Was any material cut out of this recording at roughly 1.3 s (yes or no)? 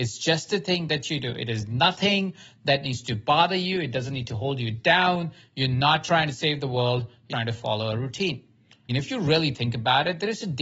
no